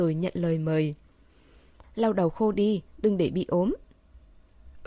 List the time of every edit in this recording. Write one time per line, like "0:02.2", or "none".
0:01.8